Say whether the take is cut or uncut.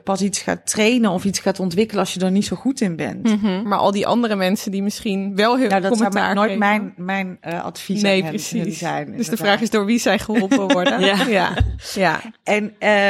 cut